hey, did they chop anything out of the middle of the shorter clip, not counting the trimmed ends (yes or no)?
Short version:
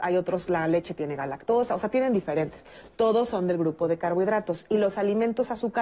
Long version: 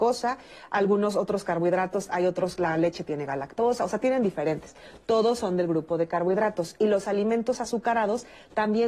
no